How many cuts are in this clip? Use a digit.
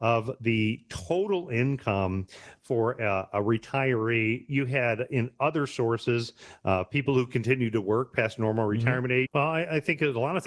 1